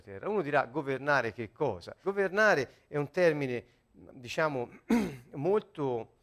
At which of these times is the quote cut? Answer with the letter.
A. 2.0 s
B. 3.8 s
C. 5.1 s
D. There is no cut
A